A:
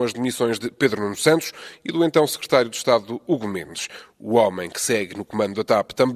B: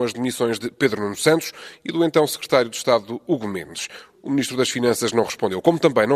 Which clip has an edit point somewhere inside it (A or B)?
B